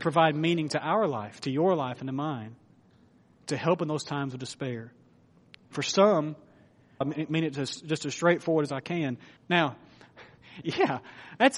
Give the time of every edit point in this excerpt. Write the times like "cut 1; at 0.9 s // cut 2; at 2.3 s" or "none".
cut 1; at 7.0 s // cut 2; at 9.4 s // cut 3; at 10.6 s